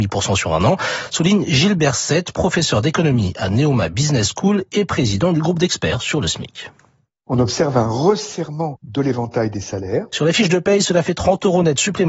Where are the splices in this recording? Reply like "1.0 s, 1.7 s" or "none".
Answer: 10.1 s